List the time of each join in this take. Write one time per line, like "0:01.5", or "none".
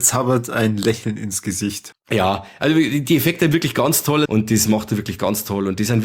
0:01.9
0:04.3